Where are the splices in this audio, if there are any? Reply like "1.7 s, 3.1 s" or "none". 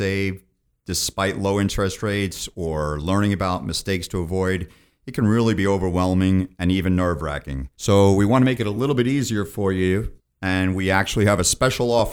7.7 s

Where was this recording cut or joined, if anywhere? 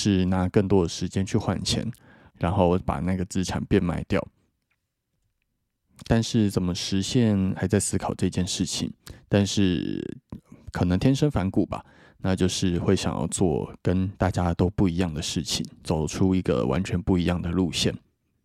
2.3 s, 7.6 s

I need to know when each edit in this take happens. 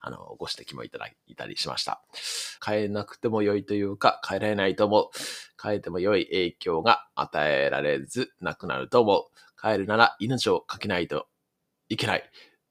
2.6 s

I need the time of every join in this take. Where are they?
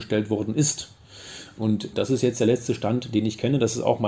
1.6 s

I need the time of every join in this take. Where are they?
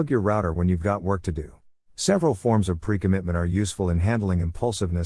1.8 s

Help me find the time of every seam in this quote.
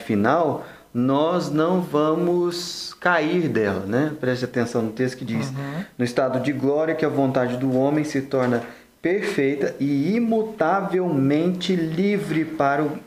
none

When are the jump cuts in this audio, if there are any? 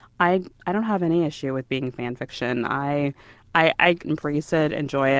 4.0 s

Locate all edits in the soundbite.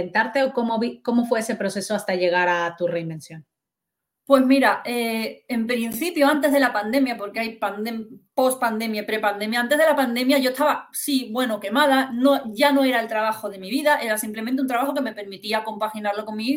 none

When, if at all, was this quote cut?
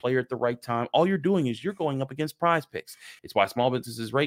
3.2 s

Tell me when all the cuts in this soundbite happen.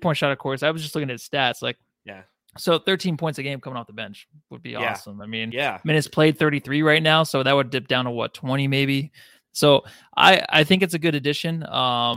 none

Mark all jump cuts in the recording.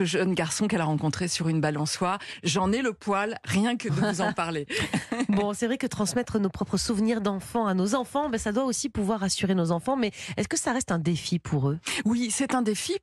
none

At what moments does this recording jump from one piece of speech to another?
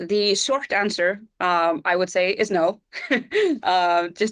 none

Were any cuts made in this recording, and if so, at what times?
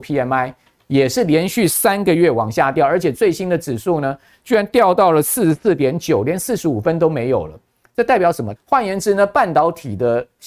8.5 s

